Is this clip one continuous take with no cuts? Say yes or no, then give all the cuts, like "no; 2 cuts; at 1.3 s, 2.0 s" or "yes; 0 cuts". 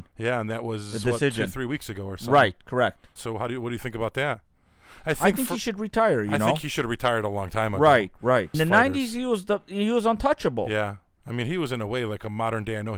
no; 2 cuts; at 3.2 s, 8.5 s